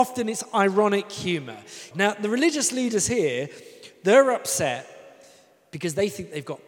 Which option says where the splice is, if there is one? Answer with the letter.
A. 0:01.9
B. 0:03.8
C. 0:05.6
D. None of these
A